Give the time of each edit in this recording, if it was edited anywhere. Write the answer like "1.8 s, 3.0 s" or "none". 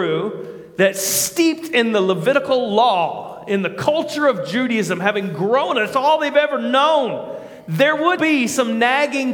8.2 s